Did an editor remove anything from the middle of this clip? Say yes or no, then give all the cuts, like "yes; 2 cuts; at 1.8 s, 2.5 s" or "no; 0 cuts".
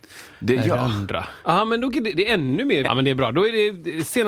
yes; 2 cuts; at 1.4 s, 2.8 s